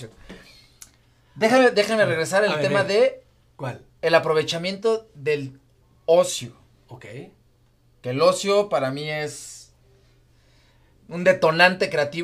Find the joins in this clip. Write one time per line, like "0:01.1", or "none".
none